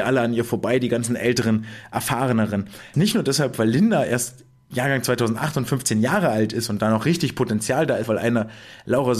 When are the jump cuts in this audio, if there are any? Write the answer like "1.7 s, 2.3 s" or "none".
2.9 s, 8.0 s